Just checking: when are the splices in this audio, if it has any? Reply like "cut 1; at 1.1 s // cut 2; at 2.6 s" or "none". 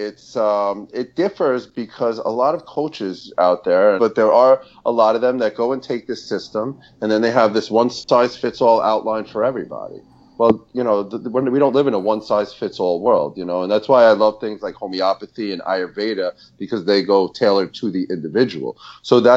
cut 1; at 4.0 s